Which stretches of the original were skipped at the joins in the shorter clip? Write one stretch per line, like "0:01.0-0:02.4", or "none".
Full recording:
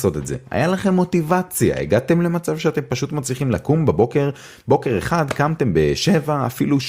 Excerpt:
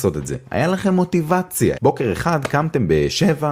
0:01.7-0:04.6